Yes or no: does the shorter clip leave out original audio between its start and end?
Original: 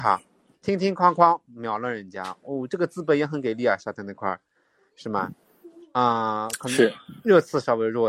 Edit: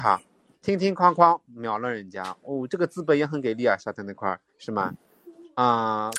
yes